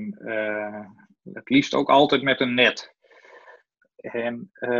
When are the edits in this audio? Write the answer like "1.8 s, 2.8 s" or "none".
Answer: 3.8 s